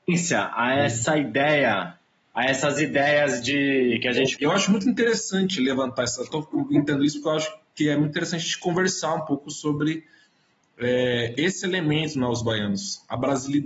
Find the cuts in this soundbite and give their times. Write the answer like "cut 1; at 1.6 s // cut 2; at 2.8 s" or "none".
cut 1; at 4.4 s